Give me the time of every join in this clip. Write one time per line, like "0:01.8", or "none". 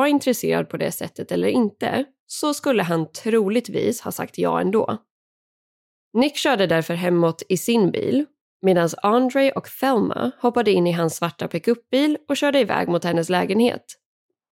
0:06.0